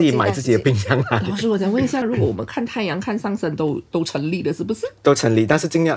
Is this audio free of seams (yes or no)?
no